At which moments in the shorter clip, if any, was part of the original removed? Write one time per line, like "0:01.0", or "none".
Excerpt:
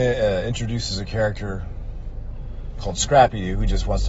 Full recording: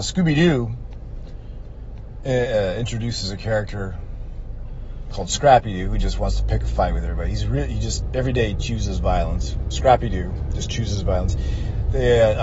none